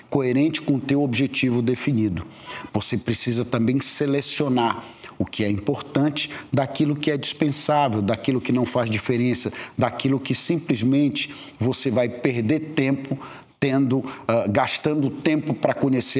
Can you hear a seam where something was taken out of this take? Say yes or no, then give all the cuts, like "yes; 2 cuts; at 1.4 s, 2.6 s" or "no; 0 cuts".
yes; 1 cut; at 2.7 s